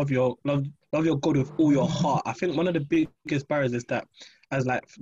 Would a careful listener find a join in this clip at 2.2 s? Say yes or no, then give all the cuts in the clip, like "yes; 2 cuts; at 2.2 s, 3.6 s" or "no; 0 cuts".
no; 0 cuts